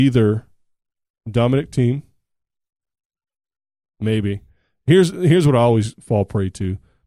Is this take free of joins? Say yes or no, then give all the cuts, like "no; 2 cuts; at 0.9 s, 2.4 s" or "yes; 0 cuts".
yes; 0 cuts